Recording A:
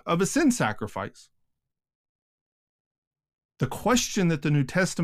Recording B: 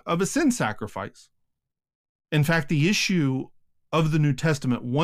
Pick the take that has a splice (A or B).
B